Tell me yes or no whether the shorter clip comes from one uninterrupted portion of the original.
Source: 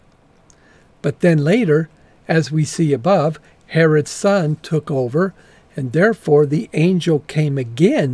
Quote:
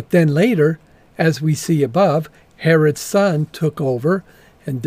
yes